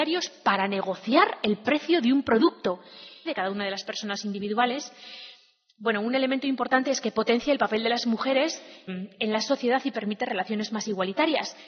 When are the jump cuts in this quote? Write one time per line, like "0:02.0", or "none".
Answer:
0:03.3
0:08.9